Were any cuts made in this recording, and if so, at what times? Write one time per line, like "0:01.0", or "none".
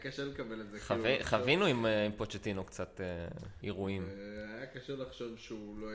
0:03.6